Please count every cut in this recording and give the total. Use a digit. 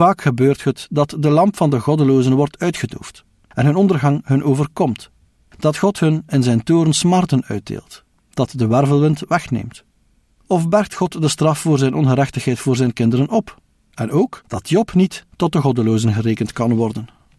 2